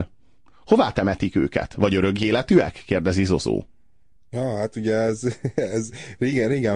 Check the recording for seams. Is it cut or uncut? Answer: uncut